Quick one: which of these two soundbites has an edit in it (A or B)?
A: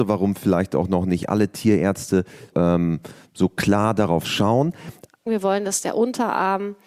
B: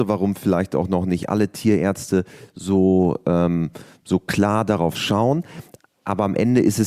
A